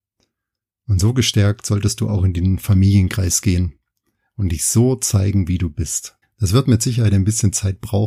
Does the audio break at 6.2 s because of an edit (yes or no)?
yes